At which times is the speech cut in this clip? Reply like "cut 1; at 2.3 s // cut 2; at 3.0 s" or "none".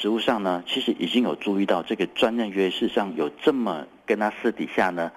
cut 1; at 4.0 s